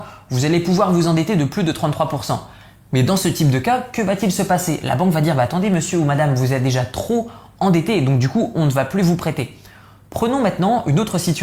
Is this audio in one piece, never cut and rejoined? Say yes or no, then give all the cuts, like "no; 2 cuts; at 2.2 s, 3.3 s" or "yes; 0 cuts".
yes; 0 cuts